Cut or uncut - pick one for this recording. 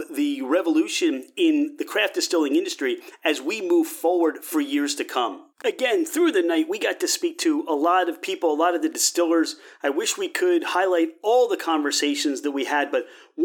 uncut